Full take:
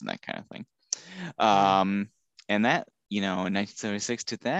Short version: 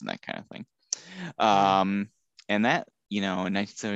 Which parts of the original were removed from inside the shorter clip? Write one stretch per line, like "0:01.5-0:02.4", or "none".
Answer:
none